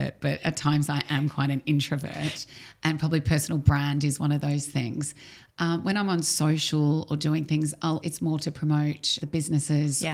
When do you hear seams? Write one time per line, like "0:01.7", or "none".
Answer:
0:08.0
0:09.2